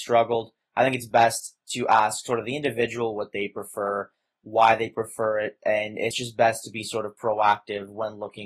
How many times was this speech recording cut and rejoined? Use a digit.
0